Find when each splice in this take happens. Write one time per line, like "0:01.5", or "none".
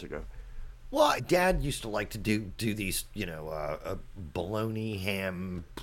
0:01.2